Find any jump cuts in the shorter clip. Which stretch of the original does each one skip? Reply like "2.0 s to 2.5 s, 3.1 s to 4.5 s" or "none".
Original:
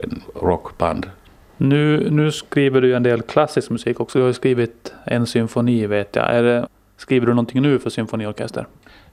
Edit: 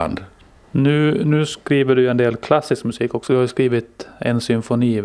none